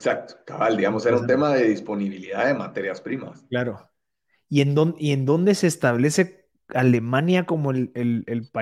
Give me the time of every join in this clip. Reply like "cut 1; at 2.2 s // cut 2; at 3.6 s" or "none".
none